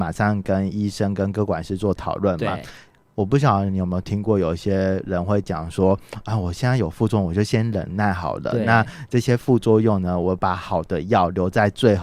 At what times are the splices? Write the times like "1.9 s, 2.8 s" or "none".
none